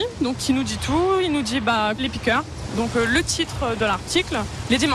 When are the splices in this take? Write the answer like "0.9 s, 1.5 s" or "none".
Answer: 2.0 s